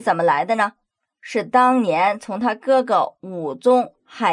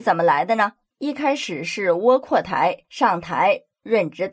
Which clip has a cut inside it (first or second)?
second